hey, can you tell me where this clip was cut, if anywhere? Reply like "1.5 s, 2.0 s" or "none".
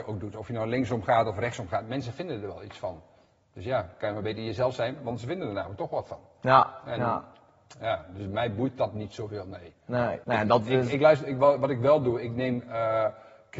10.2 s